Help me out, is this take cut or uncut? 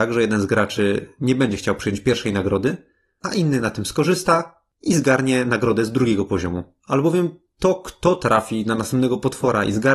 uncut